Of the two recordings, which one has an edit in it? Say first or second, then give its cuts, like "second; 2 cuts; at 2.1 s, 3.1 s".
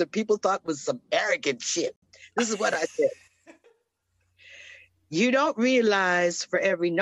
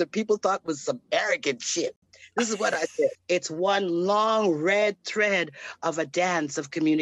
second; 1 cut; at 3.1 s